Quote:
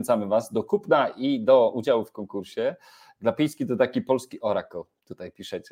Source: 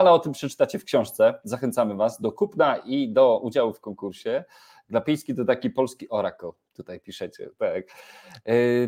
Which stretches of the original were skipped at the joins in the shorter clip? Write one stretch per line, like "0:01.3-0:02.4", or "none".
none